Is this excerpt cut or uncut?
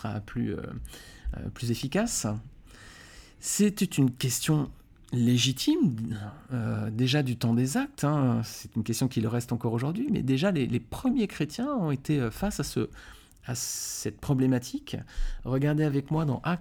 uncut